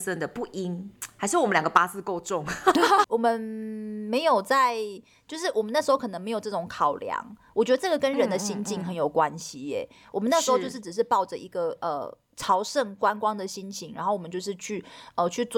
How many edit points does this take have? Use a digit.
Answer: 1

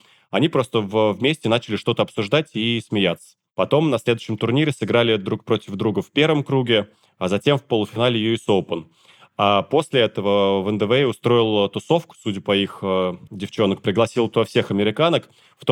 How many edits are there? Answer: 1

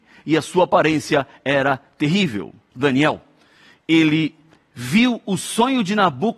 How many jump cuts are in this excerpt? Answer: 1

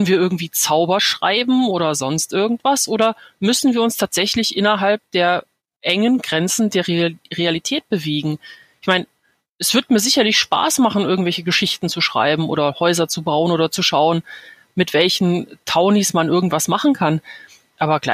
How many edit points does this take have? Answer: 0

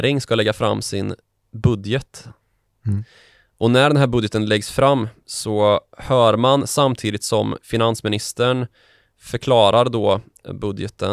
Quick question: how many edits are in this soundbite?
0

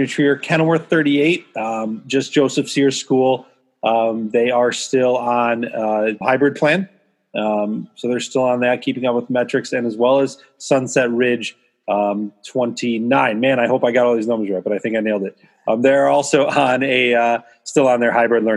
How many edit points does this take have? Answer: 1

